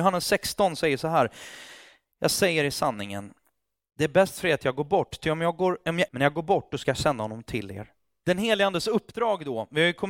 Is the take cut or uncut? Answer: cut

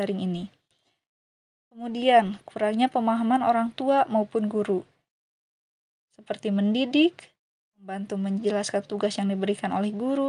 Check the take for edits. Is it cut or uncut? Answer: cut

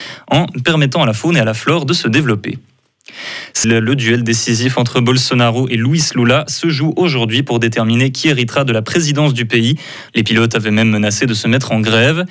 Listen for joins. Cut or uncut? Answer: cut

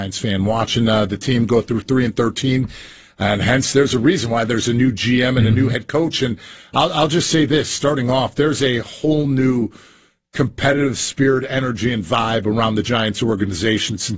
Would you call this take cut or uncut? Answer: uncut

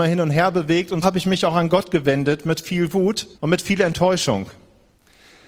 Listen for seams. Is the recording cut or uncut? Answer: cut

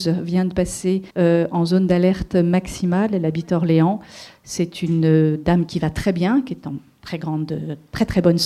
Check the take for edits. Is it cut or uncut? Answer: cut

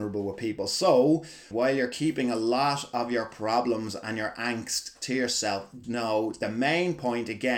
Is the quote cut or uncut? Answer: cut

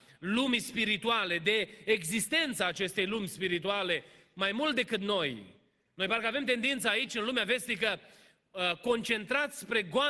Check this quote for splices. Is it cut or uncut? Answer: uncut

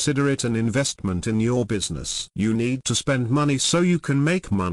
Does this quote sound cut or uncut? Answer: uncut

